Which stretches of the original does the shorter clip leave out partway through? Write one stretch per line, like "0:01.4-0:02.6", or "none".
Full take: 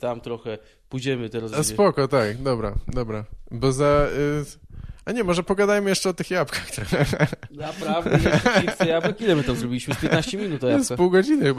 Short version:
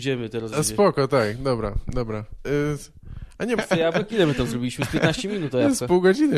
0:03.4-0:04.1
0:05.2-0:08.7

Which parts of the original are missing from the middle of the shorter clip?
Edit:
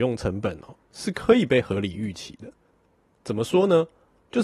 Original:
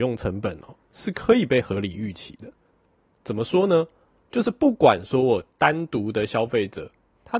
none

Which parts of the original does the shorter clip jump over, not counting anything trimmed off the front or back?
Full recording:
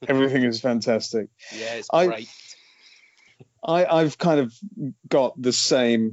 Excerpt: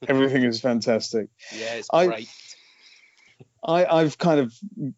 none

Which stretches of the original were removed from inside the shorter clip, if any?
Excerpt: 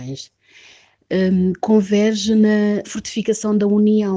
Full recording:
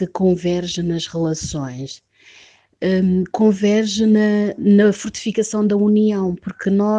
0:04.6-0:04.9

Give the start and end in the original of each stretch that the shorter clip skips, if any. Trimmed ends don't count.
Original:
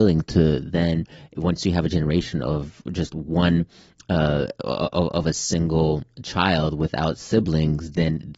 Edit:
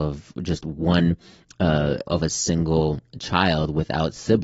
0:04.6-0:05.1

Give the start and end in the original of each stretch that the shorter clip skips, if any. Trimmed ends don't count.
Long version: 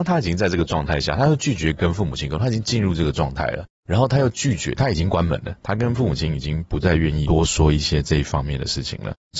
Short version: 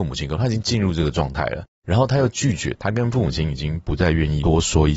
0:04.8-0:05.6

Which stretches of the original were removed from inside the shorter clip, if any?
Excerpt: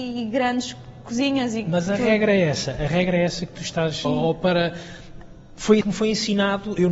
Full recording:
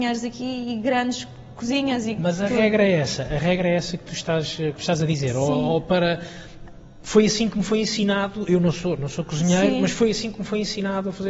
0:04.6-0:05.5
0:07.3-0:07.5

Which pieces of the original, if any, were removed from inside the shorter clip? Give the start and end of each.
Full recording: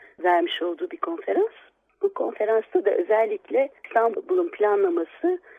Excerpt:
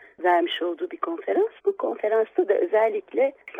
0:01.6-0:01.9

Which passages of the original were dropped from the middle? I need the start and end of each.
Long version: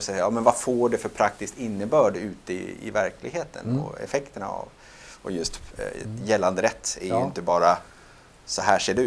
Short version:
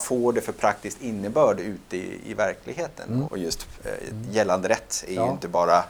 0:03.8-0:05.2

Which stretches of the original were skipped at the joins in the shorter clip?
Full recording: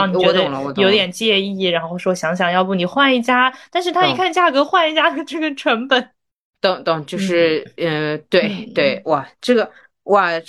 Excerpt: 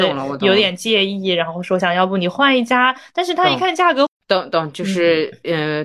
0:02.2-0:02.4
0:04.6-0:06.4

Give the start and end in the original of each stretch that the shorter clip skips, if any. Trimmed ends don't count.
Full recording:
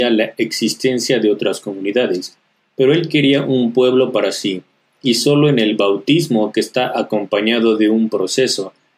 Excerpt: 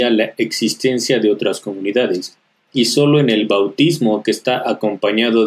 0:02.7-0:05.0

